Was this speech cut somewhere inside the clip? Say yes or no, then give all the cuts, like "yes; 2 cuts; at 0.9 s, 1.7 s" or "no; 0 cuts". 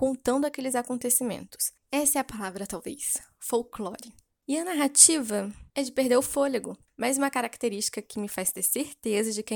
yes; 2 cuts; at 1.8 s, 6.9 s